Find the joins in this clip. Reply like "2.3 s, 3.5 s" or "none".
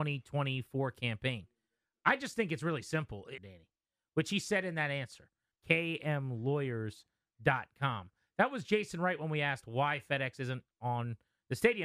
3.4 s, 5.5 s